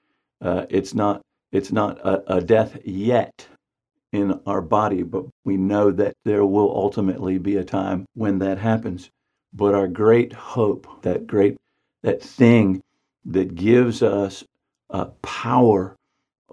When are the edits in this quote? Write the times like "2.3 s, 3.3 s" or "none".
8.1 s, 11.0 s